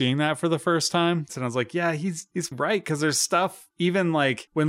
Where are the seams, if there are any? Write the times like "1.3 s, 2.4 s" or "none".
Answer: 1.3 s, 2.5 s